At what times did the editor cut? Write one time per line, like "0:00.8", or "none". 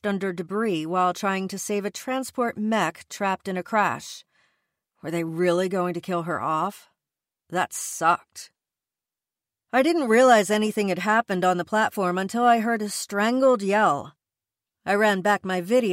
none